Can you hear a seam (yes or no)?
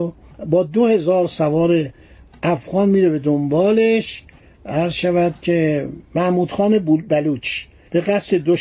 no